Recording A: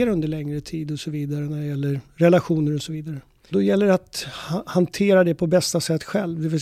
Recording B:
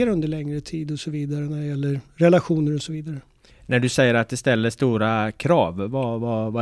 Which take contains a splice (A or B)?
A